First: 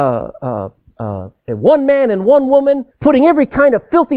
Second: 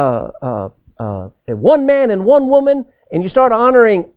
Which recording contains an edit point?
first; 1 cut; at 2.9 s

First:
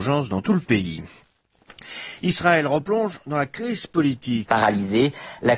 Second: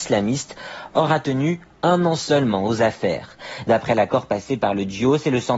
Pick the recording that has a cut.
first; 1 cut; at 4.5 s

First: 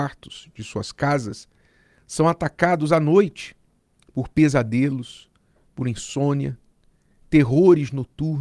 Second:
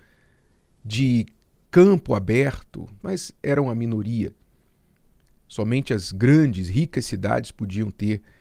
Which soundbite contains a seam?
second; 1 cut; at 3.0 s

